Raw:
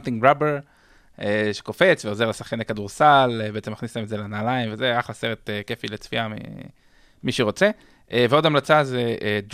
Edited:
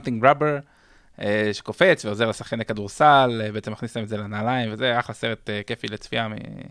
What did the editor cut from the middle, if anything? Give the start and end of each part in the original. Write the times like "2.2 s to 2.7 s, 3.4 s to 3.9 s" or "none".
none